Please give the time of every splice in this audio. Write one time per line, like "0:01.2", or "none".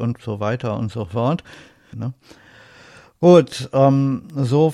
0:01.9

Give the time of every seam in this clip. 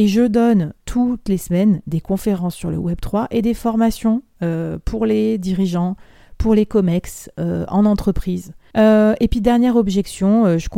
0:08.7

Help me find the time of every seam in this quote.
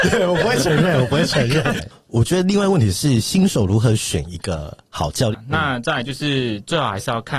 0:01.8
0:05.3

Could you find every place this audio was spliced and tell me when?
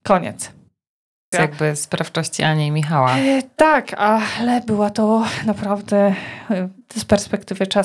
0:01.3

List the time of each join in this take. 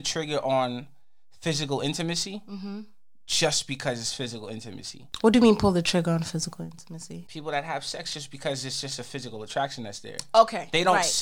none

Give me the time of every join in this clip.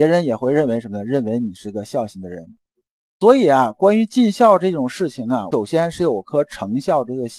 0:03.1

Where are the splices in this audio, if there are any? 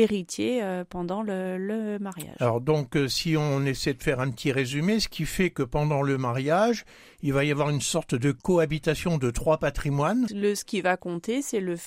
0:10.3

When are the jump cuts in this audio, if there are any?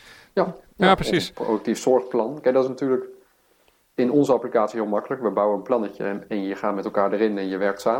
none

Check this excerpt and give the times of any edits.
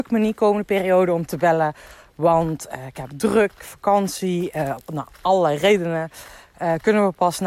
none

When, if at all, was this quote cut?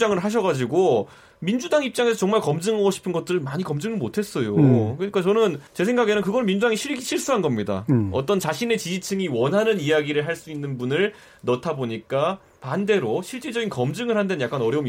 0:05.7

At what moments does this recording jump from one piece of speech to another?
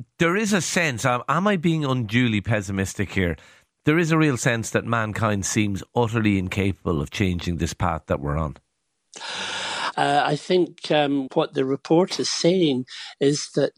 0:09.9
0:11.3

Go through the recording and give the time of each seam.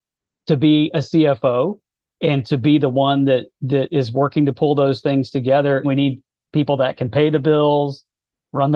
0:05.8

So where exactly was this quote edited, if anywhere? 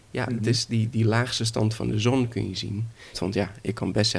0:03.1

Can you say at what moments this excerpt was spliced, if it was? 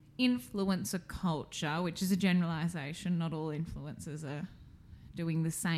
none

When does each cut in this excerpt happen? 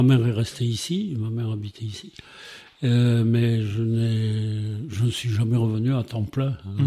none

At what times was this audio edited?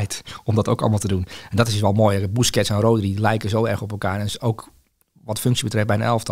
none

